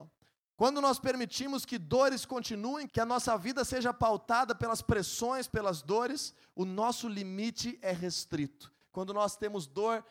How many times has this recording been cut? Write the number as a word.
three